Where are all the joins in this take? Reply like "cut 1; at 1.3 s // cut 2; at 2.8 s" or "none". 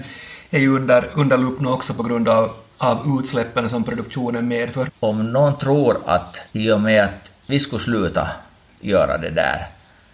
cut 1; at 4.9 s // cut 2; at 6.5 s